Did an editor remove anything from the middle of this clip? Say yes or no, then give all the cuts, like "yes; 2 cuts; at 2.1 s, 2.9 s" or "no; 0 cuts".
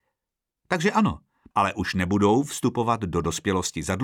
yes; 1 cut; at 1.5 s